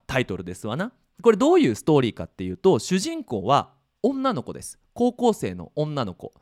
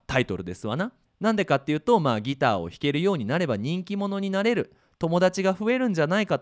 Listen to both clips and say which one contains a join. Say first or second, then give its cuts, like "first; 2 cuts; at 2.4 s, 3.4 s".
second; 1 cut; at 1.1 s